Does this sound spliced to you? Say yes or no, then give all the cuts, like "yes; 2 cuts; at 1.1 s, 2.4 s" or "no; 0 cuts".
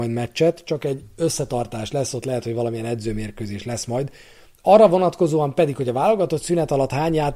no; 0 cuts